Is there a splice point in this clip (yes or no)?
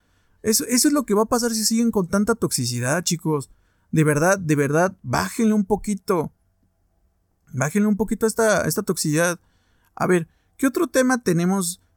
no